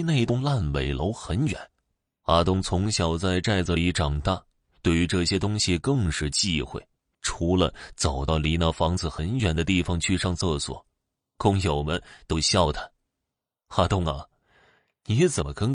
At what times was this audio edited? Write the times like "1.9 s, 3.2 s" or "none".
7.1 s